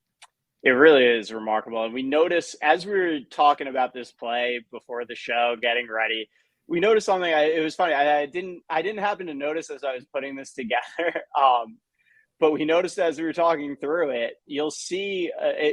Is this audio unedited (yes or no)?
yes